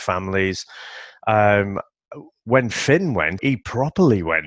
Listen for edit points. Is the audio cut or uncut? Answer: cut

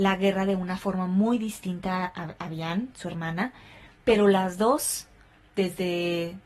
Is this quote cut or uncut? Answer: uncut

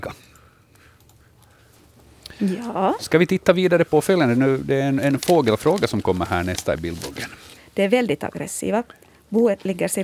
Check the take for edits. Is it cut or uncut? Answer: cut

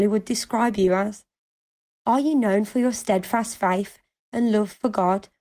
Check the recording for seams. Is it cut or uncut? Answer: uncut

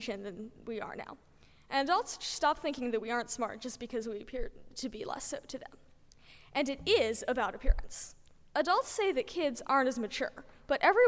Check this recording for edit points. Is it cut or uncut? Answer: uncut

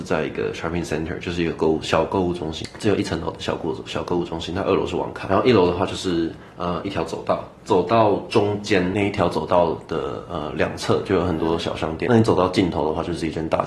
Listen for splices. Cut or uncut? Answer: cut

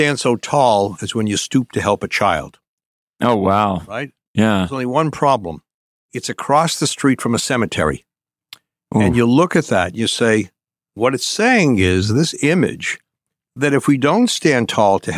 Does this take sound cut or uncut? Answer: uncut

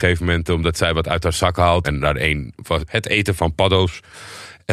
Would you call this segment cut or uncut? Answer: cut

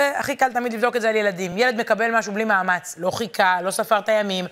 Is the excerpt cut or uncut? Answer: uncut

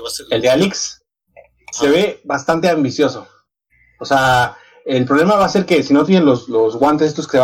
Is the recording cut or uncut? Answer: uncut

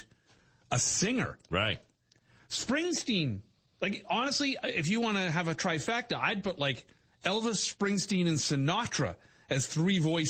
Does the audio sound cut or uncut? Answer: uncut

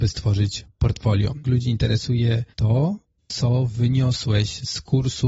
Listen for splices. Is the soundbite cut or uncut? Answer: cut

